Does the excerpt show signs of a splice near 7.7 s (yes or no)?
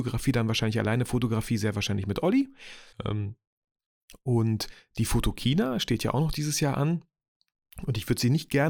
no